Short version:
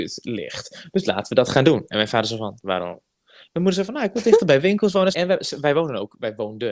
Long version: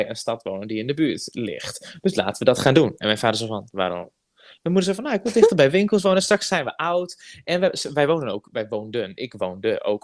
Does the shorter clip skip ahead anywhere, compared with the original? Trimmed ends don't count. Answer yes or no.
yes